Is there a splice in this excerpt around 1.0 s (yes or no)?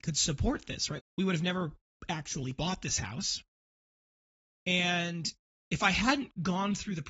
yes